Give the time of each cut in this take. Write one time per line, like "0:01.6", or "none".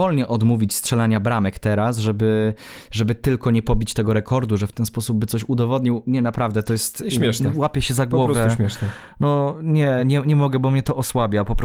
none